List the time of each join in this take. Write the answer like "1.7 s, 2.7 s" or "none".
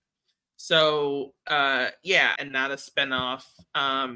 2.4 s